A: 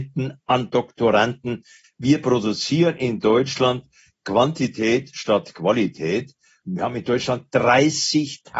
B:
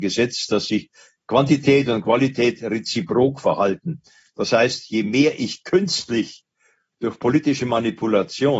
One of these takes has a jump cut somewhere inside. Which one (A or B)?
A